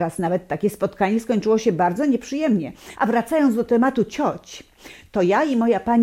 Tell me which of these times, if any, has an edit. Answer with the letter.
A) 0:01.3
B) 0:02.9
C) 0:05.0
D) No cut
B